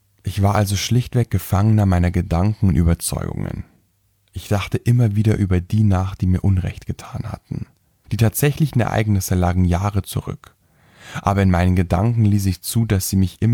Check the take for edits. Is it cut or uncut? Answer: cut